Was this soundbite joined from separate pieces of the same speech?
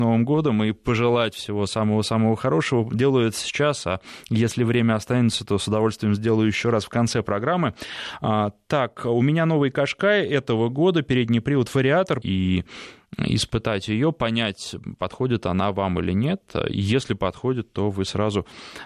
yes; 1 cut; at 12.2 s

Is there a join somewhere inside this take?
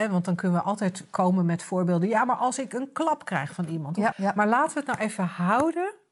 yes; 1 cut; at 4.1 s

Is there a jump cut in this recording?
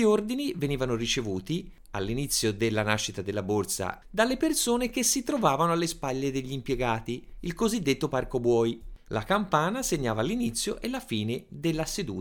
yes; 2 cuts; at 4.0 s, 9.1 s

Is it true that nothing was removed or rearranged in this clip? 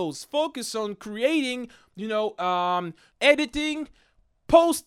no; 1 cut; at 3.1 s

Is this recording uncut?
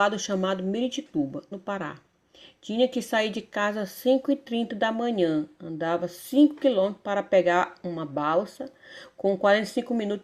no; 1 cut; at 1.5 s

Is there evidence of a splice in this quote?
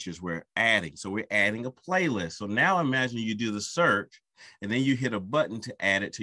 no; 0 cuts

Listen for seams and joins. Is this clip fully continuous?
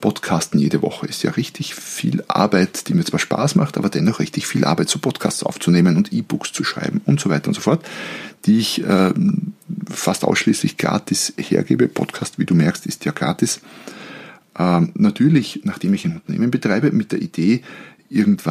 yes; 0 cuts

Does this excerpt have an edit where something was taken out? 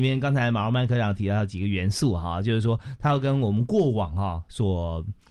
no; 0 cuts

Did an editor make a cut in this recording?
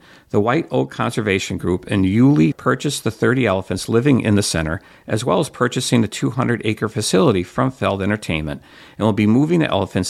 yes; 1 cut; at 2.5 s

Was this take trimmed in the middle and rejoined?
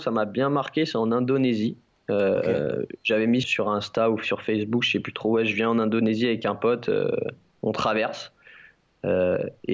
yes; 1 cut; at 3.4 s

